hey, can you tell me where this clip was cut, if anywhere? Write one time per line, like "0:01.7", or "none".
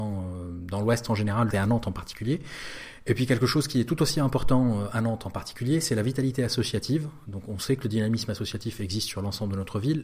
0:01.5